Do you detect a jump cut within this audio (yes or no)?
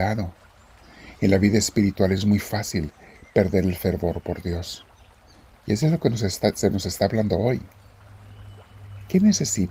no